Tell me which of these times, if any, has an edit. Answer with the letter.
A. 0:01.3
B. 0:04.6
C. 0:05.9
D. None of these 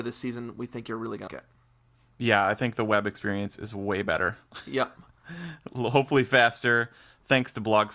A